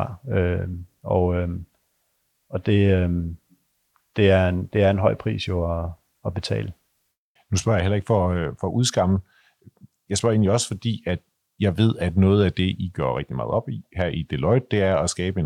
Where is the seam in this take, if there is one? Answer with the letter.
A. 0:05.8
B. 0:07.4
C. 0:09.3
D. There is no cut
B